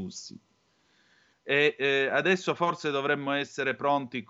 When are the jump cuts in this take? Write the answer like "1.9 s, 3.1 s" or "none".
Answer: 1.3 s

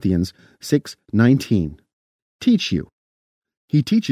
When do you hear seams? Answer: 2.2 s

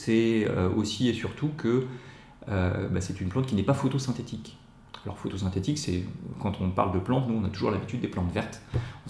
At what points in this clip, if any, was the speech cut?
none

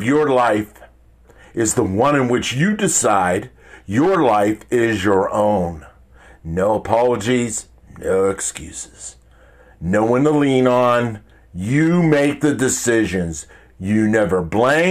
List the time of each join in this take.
none

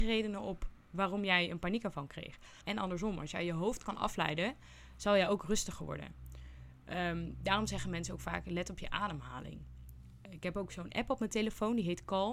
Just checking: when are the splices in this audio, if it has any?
2.6 s

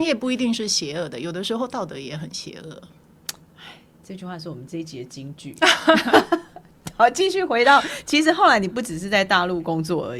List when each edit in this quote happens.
4.7 s

